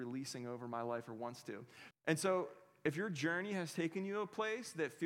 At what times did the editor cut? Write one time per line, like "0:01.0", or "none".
0:01.9